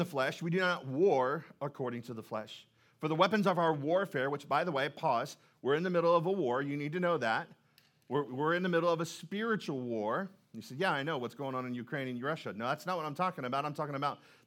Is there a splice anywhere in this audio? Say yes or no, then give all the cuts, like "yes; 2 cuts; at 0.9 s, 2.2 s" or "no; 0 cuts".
no; 0 cuts